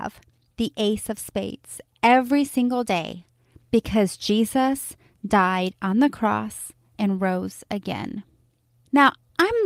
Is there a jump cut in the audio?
no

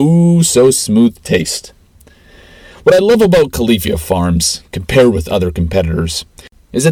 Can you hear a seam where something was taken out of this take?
no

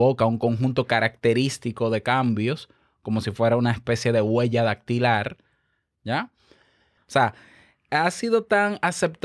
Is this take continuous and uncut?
no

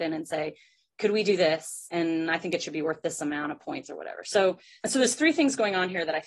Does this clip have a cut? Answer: no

